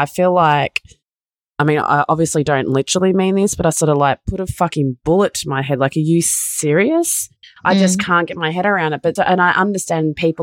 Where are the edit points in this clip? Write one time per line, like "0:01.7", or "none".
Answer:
0:09.2